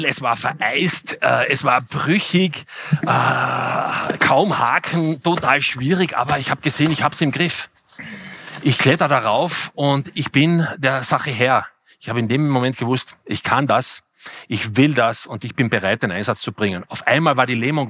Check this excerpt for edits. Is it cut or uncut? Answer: uncut